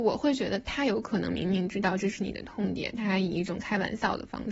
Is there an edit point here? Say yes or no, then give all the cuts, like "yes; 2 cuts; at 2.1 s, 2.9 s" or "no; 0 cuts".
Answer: no; 0 cuts